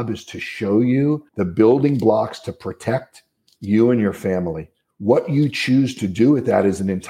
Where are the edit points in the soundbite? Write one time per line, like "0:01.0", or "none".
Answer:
0:01.3